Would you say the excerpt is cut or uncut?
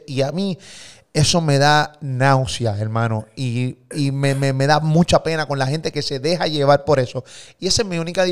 uncut